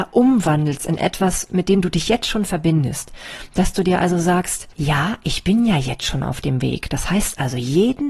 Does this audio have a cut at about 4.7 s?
yes; 1 cut; at 4.7 s

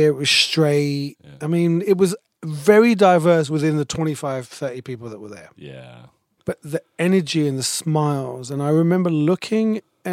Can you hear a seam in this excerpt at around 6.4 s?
yes; 1 cut; at 6.4 s

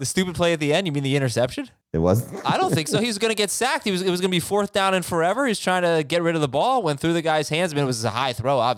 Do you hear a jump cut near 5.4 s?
no; 1 cut; at 1.8 s

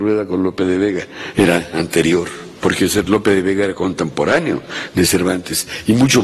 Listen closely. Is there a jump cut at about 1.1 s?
no; 1 cut; at 2.6 s

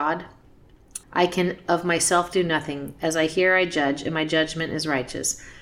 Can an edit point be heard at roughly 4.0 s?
no; 1 cut; at 1.0 s

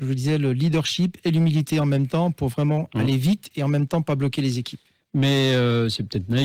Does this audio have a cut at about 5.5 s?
no; 0 cuts

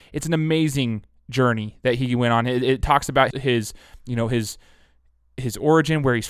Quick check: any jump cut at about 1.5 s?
no; 1 cut; at 3.3 s

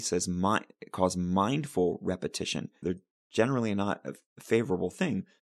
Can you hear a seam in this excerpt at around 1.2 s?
no; 1 cut; at 2.8 s

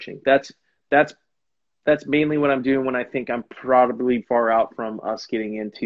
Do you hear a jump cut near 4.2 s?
yes; 1 cut; at 4.2 s

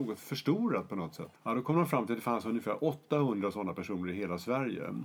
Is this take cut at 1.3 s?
yes; 1 cut; at 1.3 s

